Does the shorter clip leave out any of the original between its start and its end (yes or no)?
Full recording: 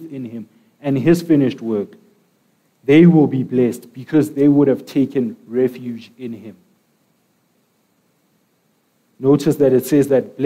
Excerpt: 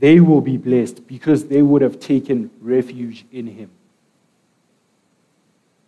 no